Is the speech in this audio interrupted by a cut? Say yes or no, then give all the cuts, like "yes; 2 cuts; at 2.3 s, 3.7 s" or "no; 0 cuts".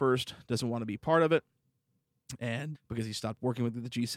yes; 1 cut; at 2.7 s